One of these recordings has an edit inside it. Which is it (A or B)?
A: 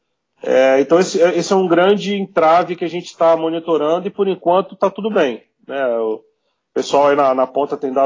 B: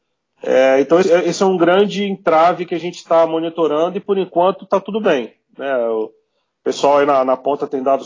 B